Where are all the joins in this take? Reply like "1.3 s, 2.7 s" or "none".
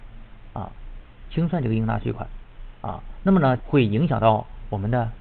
3.6 s